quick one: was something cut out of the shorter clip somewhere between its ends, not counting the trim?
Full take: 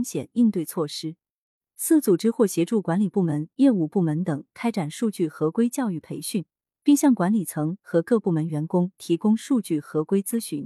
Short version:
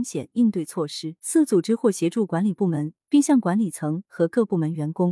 yes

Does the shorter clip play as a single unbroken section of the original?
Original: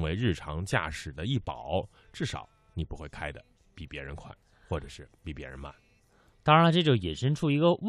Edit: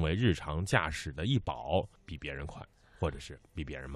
no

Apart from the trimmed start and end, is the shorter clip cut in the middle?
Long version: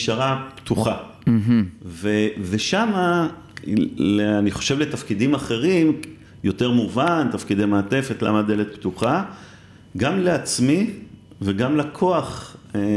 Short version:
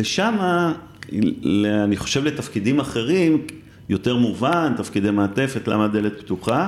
no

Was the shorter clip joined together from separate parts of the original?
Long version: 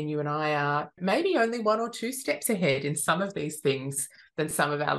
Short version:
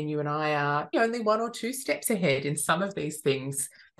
yes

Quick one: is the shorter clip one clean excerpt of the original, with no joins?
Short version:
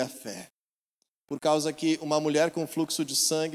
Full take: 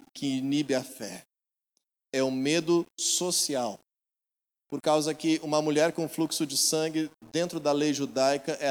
no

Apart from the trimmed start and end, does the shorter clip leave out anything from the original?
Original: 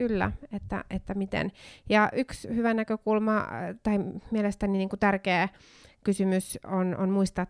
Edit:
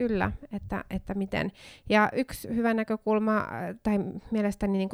no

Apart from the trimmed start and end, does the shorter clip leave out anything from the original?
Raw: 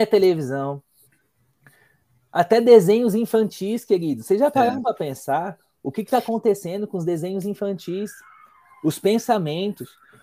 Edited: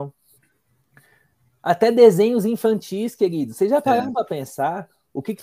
no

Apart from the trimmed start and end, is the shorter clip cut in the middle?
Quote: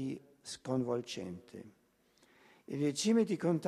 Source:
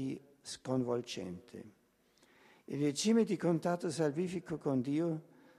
no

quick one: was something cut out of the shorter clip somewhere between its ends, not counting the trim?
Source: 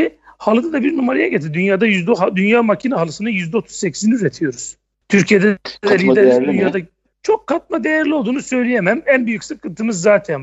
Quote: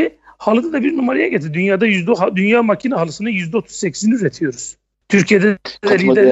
no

